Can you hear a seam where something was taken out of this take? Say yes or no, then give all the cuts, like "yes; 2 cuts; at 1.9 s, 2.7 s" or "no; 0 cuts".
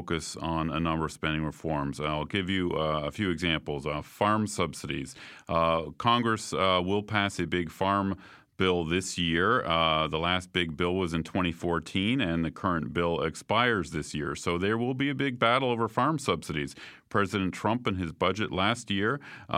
no; 0 cuts